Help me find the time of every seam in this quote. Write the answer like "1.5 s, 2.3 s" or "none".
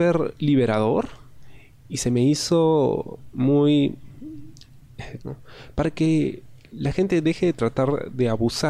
5.2 s